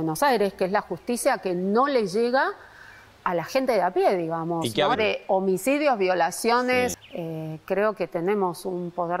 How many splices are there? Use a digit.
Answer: 2